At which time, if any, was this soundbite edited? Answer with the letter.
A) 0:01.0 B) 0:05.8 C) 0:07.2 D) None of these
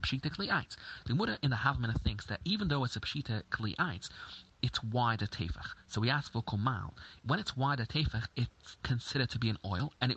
A